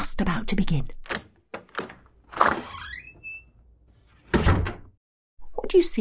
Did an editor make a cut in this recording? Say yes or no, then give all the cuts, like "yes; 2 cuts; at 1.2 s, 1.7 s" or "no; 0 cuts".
no; 0 cuts